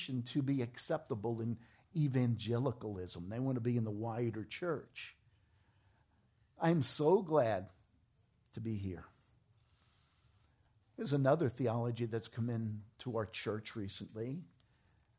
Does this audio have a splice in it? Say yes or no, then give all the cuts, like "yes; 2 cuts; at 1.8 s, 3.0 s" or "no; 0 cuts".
no; 0 cuts